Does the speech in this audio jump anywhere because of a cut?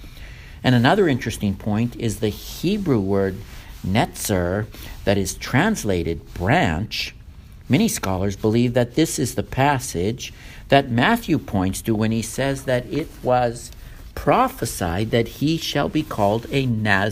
no; 0 cuts

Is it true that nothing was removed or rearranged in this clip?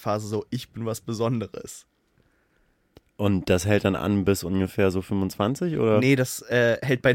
yes; 0 cuts

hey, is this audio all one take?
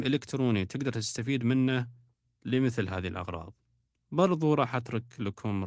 yes; 0 cuts

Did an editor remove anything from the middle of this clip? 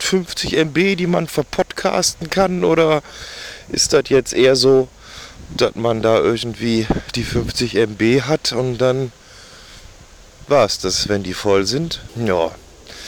yes; 1 cut; at 12.1 s

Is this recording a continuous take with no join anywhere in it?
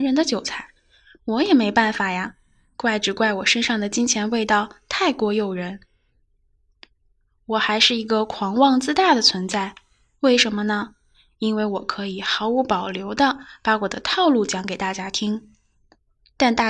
yes; 0 cuts

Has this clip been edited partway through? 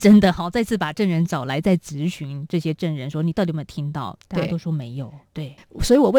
yes; 1 cut; at 5.2 s

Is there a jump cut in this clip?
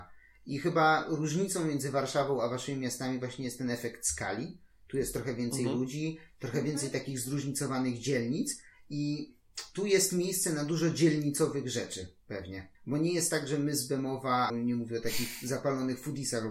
yes; 2 cuts; at 12.7 s, 14.5 s

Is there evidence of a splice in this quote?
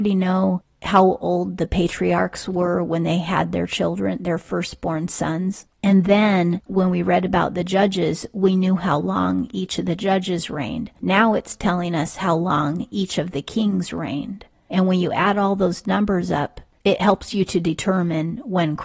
yes; 1 cut; at 5.7 s

